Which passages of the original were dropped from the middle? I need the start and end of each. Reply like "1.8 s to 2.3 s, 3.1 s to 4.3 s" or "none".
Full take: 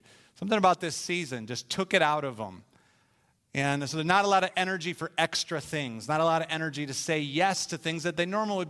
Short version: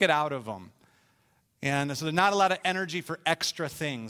none